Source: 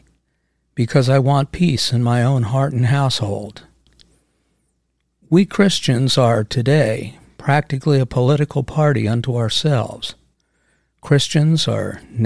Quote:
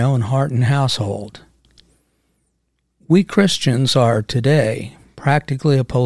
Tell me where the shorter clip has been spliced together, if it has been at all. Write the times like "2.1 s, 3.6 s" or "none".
none